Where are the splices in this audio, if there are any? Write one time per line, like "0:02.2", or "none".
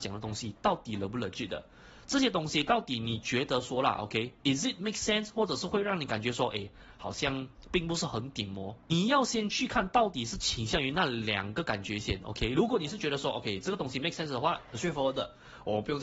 none